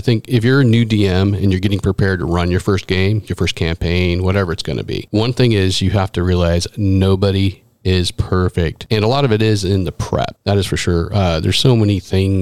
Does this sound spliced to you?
yes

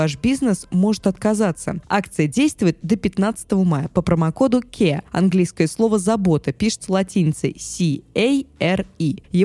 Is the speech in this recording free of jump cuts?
no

